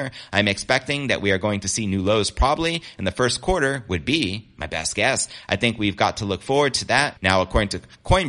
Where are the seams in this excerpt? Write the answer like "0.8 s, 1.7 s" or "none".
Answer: 7.2 s